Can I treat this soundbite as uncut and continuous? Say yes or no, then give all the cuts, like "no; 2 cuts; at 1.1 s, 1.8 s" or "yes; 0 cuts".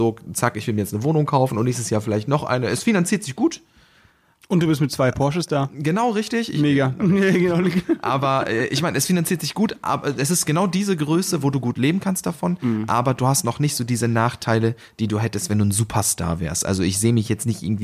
no; 1 cut; at 7.0 s